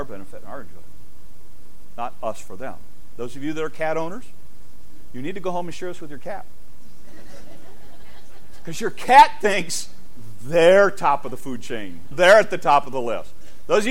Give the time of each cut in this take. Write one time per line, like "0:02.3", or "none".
0:12.1